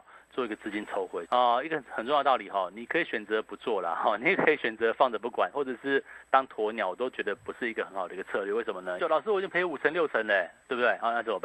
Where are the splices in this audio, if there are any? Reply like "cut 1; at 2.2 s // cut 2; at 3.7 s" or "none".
cut 1; at 1.3 s // cut 2; at 9.0 s